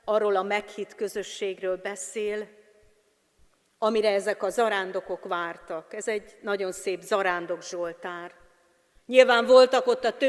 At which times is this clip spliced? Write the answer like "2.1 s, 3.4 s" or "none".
9.0 s